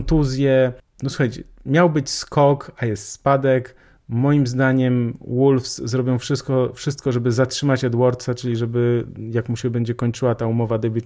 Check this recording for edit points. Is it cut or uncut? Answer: uncut